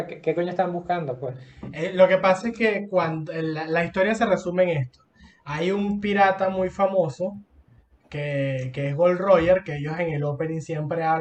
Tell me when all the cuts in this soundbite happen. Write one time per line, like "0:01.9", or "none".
none